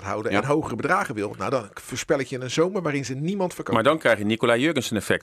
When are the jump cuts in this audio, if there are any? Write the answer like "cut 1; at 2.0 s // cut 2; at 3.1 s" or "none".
none